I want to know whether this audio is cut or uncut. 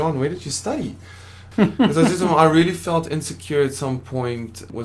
cut